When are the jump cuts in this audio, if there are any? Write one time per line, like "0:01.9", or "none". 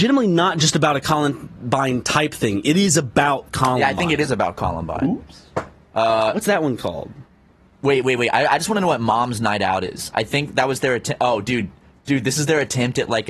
none